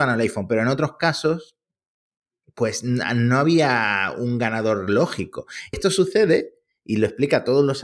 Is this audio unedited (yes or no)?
no